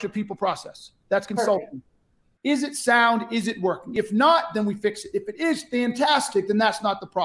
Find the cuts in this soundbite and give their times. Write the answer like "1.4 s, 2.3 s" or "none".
2.4 s